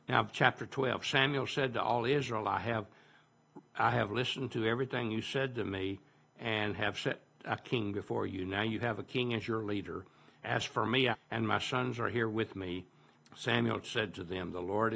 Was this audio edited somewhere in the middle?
yes; 2 cuts; at 11.1 s, 13.2 s

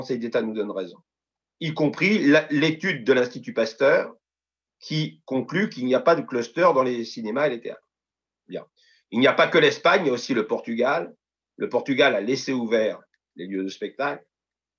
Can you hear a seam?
no; 0 cuts

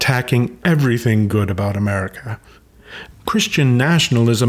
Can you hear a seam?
yes; 1 cut; at 3.1 s

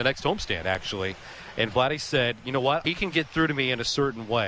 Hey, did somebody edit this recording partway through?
yes; 1 cut; at 2.8 s

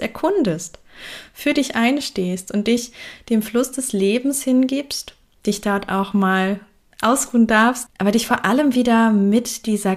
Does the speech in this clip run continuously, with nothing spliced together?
no; 1 cut; at 7.9 s

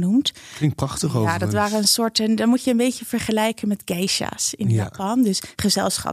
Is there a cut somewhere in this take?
no; 0 cuts

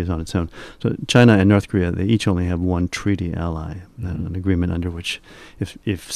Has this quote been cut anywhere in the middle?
no; 0 cuts

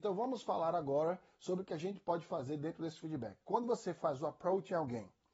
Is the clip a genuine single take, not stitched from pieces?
yes; 0 cuts

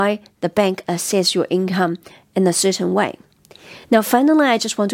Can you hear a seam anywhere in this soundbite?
no; 0 cuts

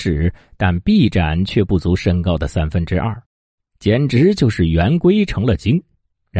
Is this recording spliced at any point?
yes; 1 cut; at 3.6 s

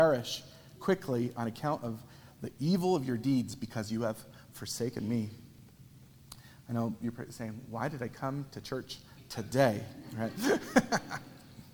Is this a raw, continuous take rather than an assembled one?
yes; 0 cuts

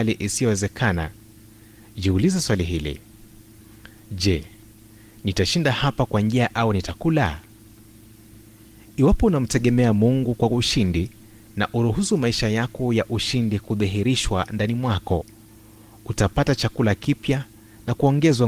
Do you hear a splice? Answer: no; 0 cuts

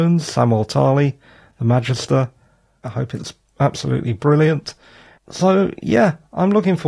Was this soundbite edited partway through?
yes; 1 cut; at 2.8 s

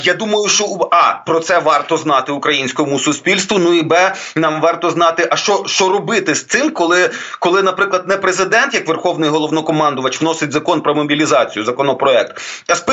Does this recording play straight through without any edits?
yes; 0 cuts

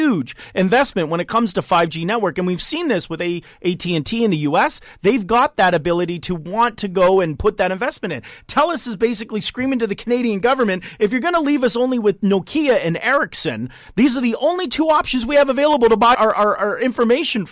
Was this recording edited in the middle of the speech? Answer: yes; 1 cut; at 16.1 s

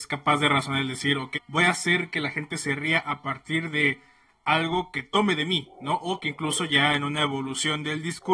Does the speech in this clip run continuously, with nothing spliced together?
no; 1 cut; at 1.3 s

